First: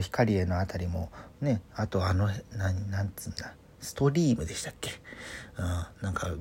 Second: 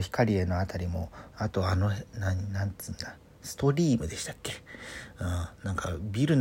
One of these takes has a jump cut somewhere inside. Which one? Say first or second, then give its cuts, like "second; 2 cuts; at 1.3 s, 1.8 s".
second; 1 cut; at 1.3 s